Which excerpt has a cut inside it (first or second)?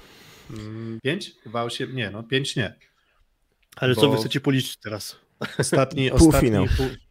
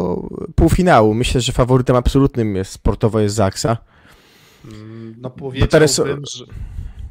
first